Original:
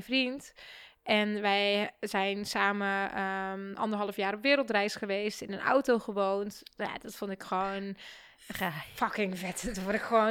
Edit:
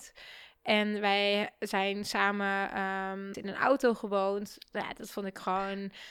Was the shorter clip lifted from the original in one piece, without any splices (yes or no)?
no